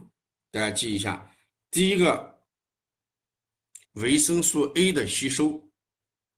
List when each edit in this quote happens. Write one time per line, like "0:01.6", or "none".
0:03.9